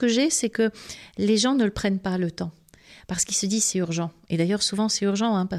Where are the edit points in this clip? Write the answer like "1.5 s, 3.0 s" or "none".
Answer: none